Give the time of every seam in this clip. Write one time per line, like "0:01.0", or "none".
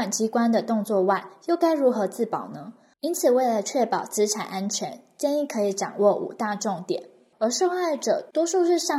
0:02.9
0:07.3